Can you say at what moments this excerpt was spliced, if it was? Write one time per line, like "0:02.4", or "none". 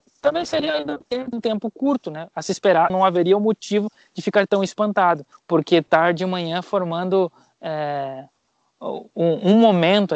0:02.9
0:05.4

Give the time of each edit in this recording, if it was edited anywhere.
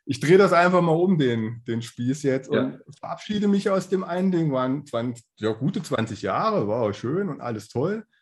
none

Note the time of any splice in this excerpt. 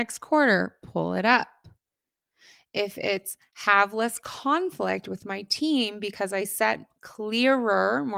none

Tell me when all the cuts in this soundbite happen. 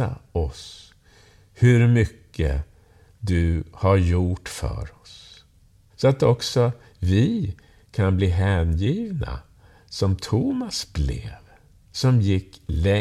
0:05.9

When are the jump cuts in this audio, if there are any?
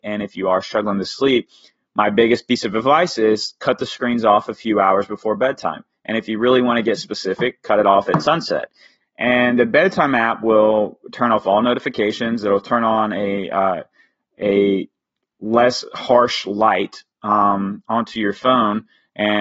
0:09.0

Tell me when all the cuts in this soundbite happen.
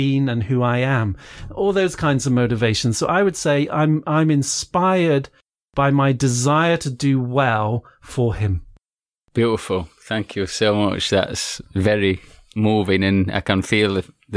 none

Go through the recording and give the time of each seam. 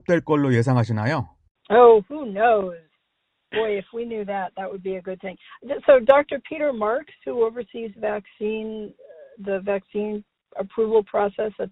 none

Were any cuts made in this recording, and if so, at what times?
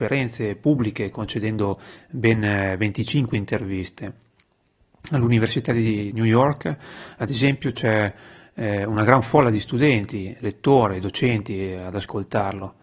none

